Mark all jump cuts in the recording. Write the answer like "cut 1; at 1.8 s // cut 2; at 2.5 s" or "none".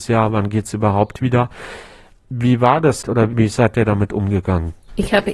cut 1; at 3.0 s